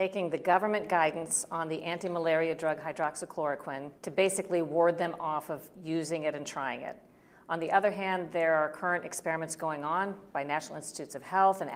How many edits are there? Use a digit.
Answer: 1